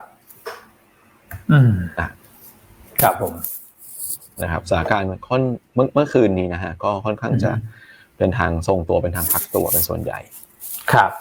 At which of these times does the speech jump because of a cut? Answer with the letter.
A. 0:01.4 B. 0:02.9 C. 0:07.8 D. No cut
A